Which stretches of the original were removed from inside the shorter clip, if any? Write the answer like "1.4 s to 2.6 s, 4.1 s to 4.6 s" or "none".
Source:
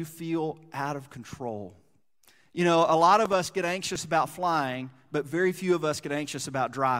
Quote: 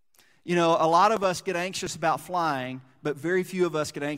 none

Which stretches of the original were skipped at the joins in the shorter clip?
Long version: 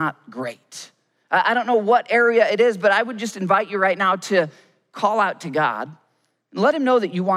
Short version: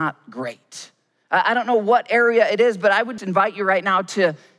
3.2 s to 3.3 s

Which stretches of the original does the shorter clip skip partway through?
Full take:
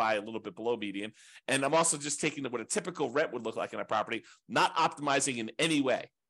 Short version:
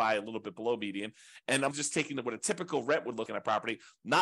1.7 s to 2.0 s, 3.5 s to 3.7 s

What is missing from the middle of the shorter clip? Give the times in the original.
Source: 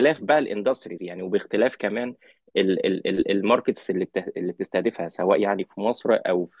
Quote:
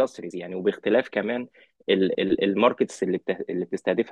2.8 s to 3.0 s

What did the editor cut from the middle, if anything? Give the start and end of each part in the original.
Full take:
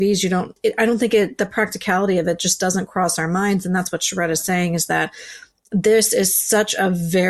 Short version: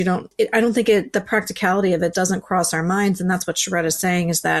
2.4 s to 2.6 s

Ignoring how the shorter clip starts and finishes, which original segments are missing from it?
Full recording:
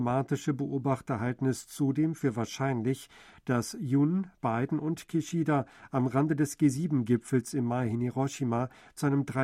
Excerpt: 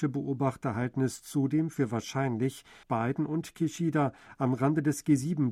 3.3 s to 4.4 s

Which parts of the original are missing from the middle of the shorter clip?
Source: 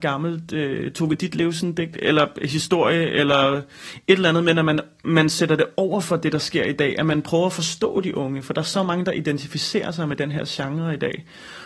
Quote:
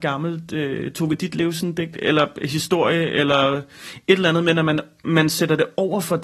none

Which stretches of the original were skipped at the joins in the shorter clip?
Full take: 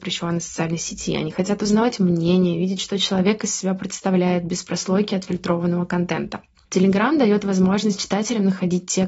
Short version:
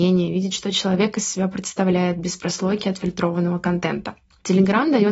none

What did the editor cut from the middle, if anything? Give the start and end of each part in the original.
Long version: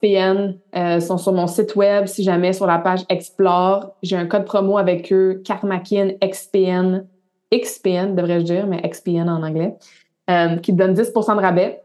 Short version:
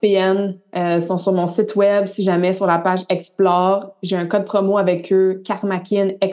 none

